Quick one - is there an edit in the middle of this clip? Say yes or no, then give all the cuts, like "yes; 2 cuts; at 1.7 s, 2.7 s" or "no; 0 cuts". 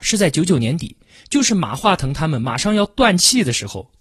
no; 0 cuts